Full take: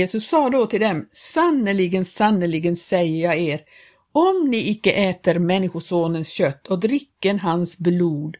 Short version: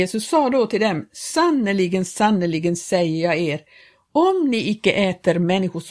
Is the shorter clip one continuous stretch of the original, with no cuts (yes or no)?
yes